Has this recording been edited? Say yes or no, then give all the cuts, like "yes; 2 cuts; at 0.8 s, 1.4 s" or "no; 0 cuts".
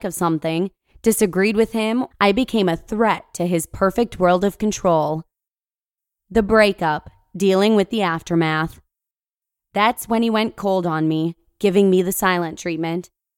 yes; 1 cut; at 2.1 s